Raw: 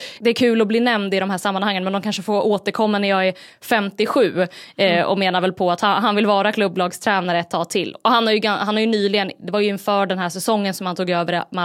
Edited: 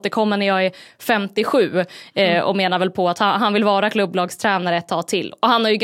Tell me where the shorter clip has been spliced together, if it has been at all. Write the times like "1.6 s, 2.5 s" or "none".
none